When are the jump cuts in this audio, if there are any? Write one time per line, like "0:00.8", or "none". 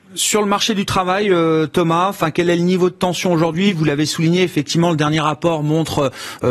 none